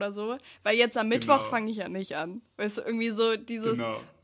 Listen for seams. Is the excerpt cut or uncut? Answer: uncut